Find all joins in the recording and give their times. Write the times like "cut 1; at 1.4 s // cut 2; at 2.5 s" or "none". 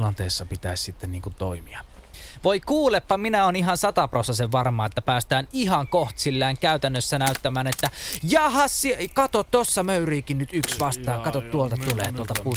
none